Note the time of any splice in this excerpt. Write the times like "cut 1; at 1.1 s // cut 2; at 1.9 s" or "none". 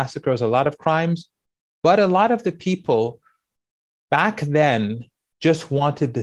none